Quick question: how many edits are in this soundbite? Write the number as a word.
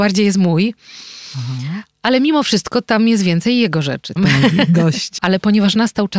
two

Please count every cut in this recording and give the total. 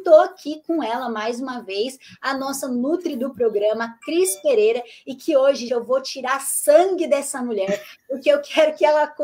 one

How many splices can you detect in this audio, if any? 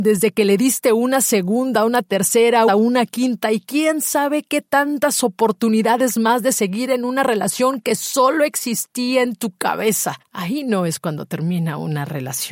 two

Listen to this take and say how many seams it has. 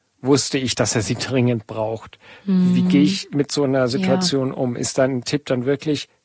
zero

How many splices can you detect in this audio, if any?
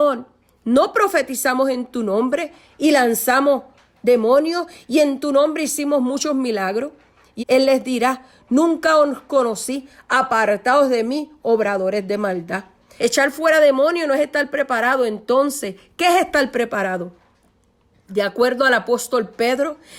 two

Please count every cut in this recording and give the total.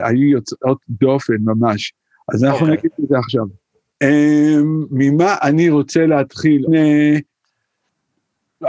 two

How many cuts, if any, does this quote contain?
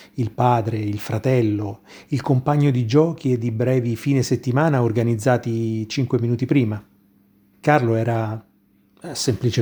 one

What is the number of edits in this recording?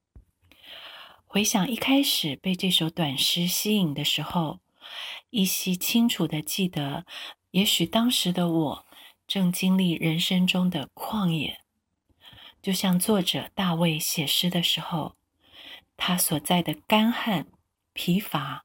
one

